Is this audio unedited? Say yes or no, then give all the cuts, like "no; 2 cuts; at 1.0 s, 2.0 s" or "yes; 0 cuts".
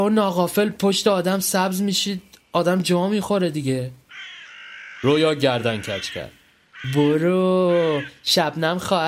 yes; 0 cuts